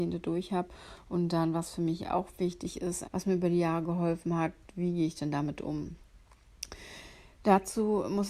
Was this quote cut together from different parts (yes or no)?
yes